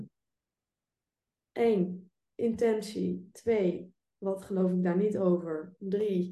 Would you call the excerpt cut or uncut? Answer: uncut